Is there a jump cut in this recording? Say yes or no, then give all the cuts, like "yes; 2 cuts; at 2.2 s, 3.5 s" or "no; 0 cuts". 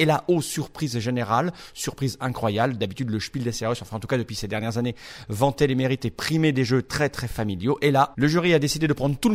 no; 0 cuts